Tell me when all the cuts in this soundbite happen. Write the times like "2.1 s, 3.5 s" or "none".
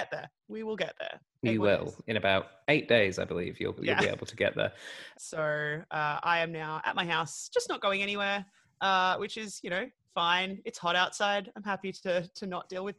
3.8 s, 5.1 s